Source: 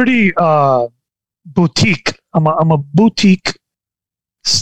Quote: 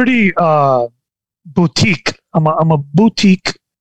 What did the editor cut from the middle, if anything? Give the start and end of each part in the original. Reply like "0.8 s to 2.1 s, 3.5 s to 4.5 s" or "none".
none